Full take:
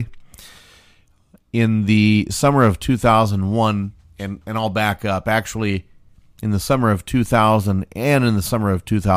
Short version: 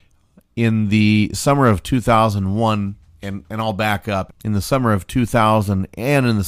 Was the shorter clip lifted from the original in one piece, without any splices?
no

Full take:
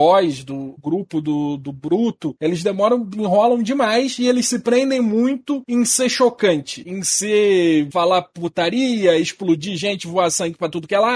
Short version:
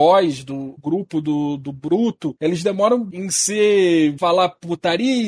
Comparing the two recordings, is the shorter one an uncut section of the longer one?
no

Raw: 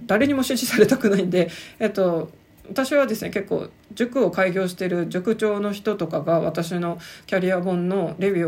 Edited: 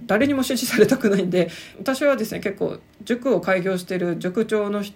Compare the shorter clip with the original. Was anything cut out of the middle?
yes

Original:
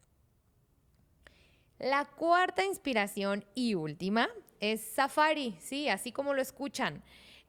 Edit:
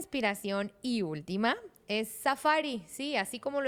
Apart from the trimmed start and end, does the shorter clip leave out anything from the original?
no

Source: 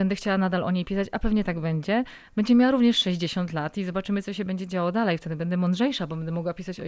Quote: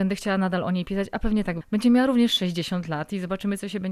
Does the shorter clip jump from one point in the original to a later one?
yes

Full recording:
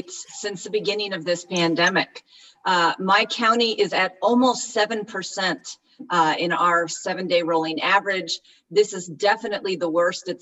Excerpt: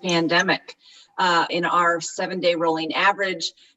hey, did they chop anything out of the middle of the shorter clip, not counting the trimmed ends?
yes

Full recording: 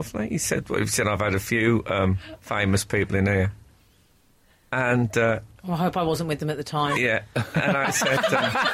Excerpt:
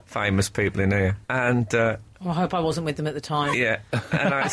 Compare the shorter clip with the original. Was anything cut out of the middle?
yes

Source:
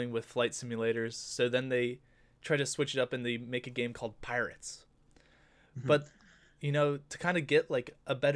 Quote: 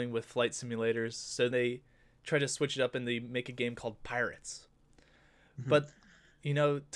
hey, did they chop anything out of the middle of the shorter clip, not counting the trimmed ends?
yes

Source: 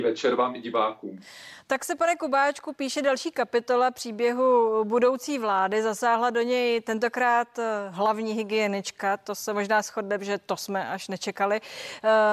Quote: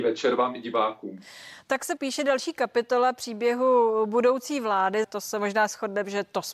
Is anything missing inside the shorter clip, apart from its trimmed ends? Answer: yes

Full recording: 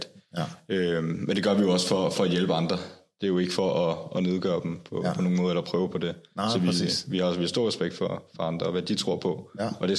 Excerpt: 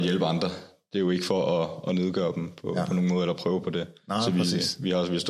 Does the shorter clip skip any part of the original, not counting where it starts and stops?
no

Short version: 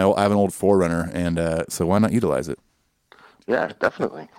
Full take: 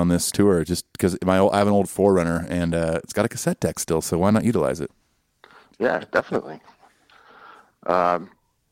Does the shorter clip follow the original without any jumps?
no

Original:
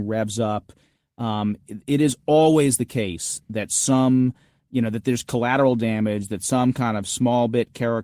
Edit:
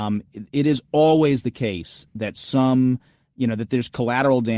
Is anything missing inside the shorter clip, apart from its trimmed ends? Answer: no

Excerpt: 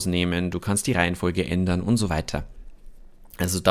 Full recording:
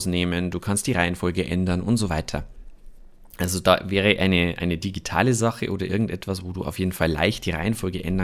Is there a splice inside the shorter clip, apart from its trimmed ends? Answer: no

